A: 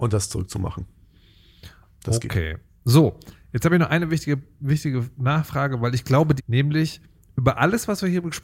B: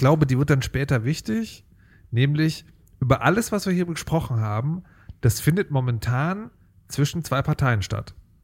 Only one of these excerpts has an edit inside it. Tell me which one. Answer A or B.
A